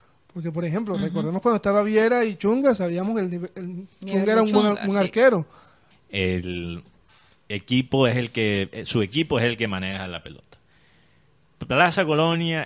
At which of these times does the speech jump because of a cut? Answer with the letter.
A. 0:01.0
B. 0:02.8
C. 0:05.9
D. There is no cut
C